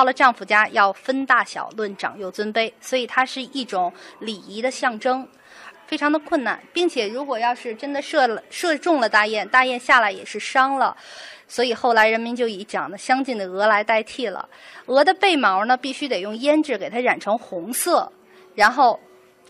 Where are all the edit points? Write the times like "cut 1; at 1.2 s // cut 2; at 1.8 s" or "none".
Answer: cut 1; at 5.7 s